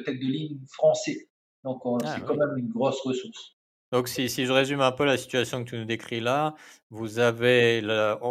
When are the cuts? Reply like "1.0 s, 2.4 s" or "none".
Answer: 3.9 s